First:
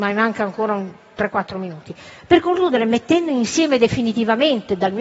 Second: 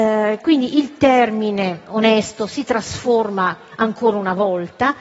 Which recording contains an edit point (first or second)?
second